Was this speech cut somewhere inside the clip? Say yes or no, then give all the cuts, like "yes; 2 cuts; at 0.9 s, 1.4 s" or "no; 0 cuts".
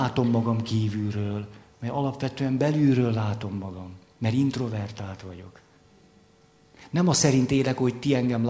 no; 0 cuts